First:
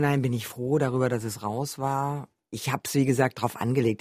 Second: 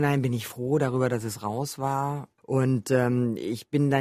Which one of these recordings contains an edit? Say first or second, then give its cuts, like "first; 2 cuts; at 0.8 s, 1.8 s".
second; 1 cut; at 2.4 s